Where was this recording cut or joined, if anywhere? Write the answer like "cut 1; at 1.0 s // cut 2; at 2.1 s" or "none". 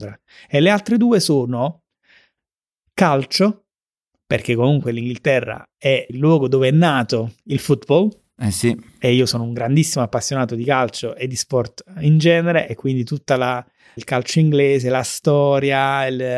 cut 1; at 6.1 s // cut 2; at 14.0 s